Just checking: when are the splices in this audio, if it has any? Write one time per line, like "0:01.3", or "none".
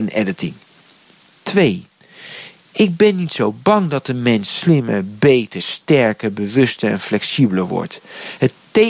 none